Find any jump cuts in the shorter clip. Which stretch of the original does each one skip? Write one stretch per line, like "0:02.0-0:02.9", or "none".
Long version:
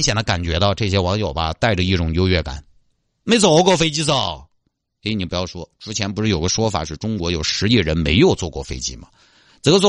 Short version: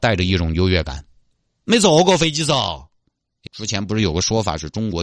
0:05.1-0:05.7